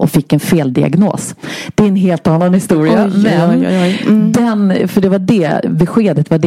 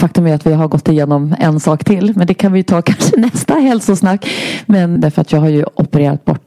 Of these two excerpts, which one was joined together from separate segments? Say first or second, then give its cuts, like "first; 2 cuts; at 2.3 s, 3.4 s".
second; 1 cut; at 5.0 s